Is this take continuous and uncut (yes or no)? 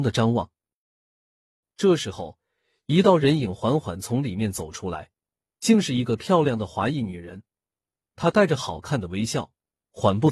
yes